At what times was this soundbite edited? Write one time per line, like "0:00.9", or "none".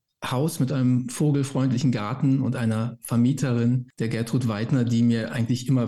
none